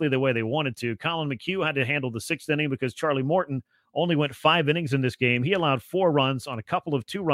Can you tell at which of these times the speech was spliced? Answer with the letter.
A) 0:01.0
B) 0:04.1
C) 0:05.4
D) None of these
D